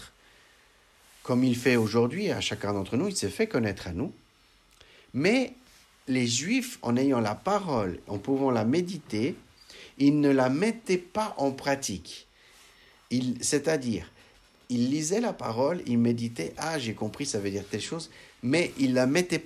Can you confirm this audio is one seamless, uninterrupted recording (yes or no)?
yes